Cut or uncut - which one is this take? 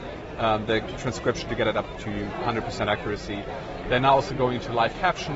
uncut